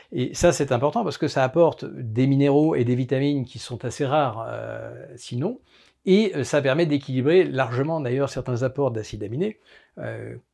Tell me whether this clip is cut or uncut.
uncut